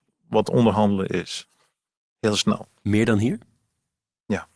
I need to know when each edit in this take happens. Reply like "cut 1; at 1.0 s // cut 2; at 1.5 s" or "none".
none

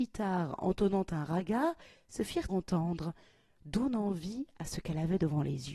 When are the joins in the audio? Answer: cut 1; at 2.5 s

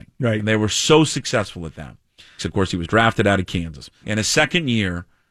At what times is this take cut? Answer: cut 1; at 2.4 s // cut 2; at 4.0 s

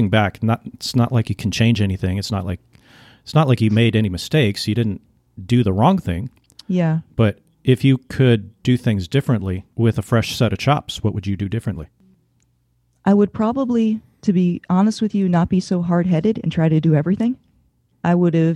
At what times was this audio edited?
none

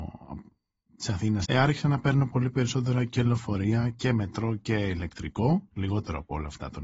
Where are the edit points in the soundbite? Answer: cut 1; at 1.4 s

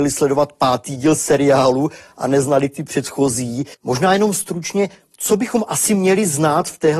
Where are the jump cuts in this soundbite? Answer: cut 1; at 3.7 s

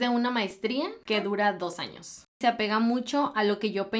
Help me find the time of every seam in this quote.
cut 1; at 2.3 s

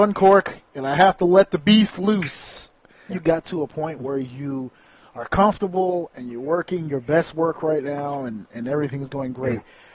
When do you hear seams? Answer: cut 1; at 3.1 s

